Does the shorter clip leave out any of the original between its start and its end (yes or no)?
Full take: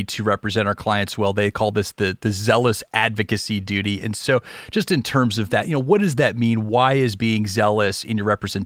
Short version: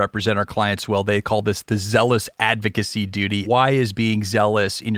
yes